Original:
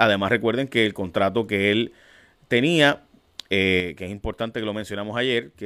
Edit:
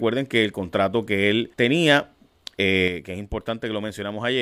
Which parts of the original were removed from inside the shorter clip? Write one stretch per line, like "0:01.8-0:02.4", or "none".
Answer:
0:01.9-0:02.5

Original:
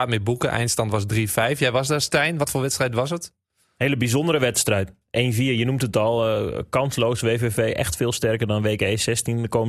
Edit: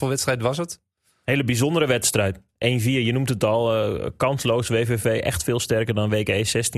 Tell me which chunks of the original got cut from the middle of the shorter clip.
none

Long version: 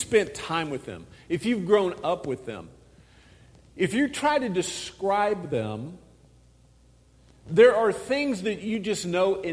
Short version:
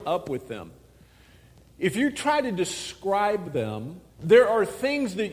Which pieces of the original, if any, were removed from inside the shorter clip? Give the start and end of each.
0:06.1-0:07.4

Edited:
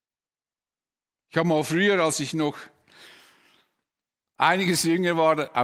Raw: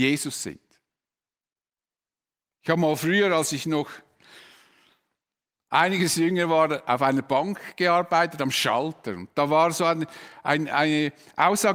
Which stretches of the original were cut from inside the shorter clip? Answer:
none

